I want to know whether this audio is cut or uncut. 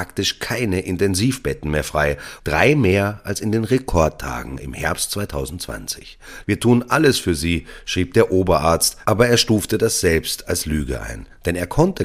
cut